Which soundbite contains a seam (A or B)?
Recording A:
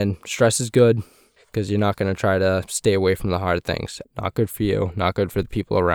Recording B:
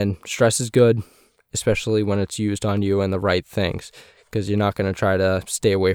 A